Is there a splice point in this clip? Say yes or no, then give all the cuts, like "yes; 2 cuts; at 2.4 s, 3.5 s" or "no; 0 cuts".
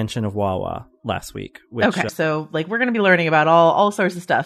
yes; 1 cut; at 2.1 s